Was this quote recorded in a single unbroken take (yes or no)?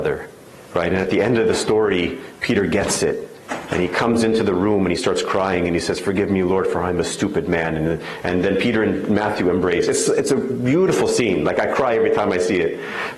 yes